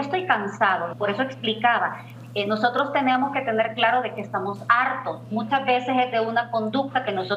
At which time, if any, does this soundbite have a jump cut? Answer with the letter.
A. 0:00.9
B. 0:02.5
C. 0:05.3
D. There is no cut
A